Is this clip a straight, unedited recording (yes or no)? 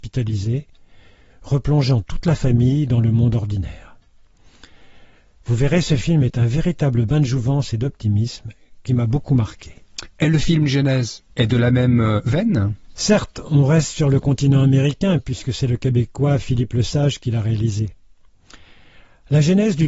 no